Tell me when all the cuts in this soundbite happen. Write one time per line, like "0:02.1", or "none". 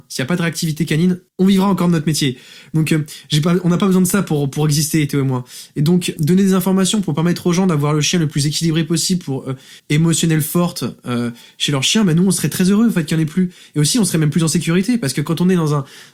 0:01.3
0:06.2
0:09.8